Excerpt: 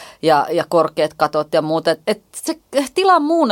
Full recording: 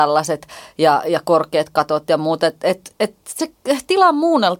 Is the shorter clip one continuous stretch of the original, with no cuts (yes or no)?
no